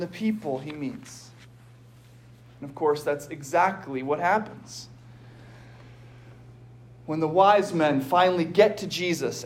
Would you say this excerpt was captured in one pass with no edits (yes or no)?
yes